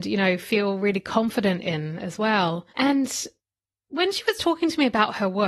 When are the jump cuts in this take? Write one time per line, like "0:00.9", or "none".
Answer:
0:02.7